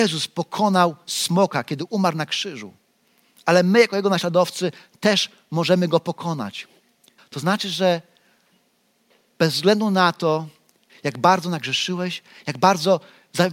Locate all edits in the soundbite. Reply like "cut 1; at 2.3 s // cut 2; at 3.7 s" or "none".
cut 1; at 7.2 s // cut 2; at 10.9 s

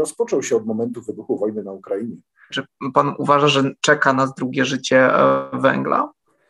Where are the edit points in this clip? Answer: cut 1; at 2.5 s

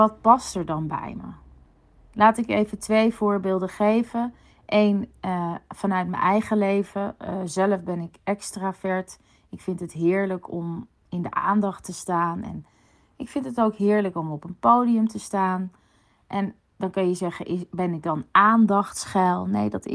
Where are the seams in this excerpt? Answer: none

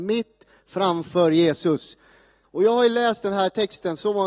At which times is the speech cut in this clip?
cut 1; at 2.4 s

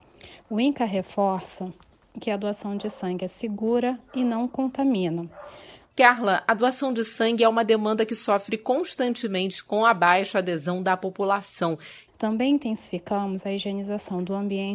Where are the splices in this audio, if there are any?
cut 1; at 5.9 s // cut 2; at 12.1 s

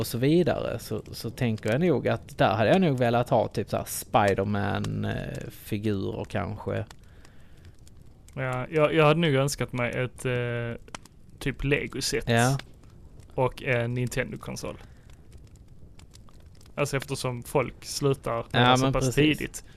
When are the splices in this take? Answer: cut 1; at 16.7 s // cut 2; at 18.5 s

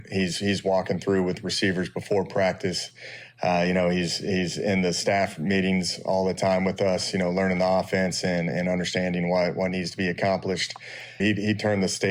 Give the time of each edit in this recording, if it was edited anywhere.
cut 1; at 11.2 s

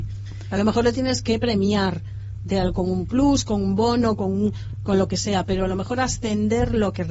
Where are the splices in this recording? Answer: none

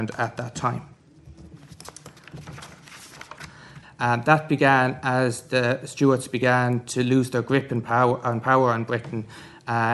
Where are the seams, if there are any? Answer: cut 1; at 3.8 s

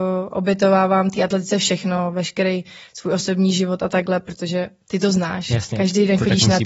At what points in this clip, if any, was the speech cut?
none

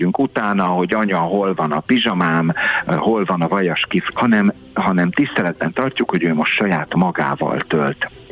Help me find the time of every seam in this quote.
cut 1; at 4.1 s

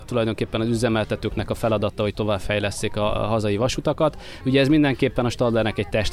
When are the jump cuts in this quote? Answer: cut 1; at 4.4 s

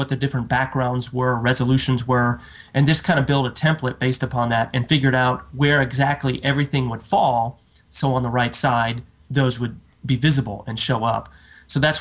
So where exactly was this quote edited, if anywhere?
none

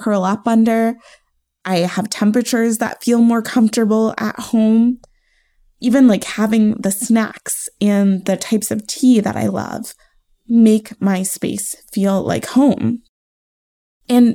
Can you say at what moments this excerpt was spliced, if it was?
none

